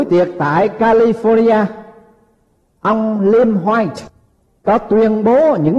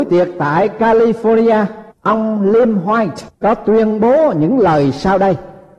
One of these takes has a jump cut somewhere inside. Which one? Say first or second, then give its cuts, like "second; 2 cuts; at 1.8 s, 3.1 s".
second; 2 cuts; at 1.9 s, 3.3 s